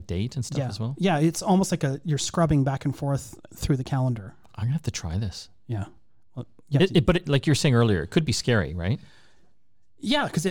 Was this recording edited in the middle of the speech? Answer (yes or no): no